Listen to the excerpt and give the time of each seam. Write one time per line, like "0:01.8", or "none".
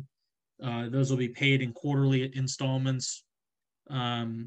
none